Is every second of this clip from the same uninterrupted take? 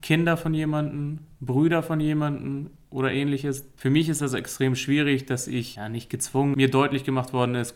no; 2 cuts; at 3.8 s, 6.5 s

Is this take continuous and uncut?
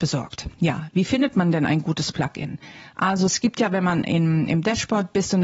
yes; 0 cuts

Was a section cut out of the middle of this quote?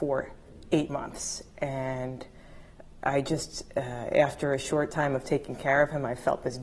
no; 0 cuts

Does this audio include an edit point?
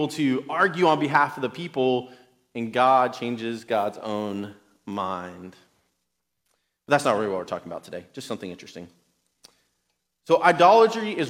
no; 0 cuts

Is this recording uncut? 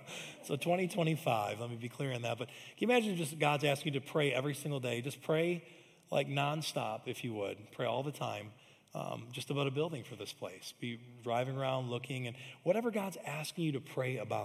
yes; 0 cuts

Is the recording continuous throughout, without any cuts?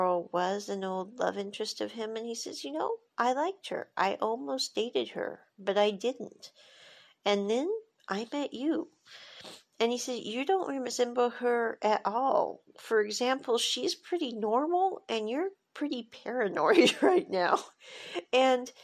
yes; 0 cuts

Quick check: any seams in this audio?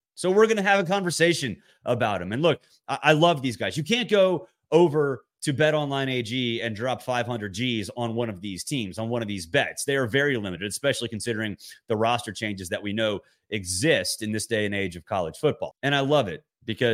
yes; 1 cut; at 15.7 s

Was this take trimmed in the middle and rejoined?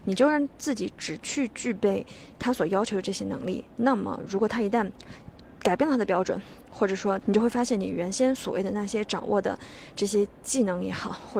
yes; 1 cut; at 7.2 s

